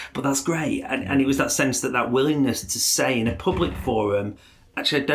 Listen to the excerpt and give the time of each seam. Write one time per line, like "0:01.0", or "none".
none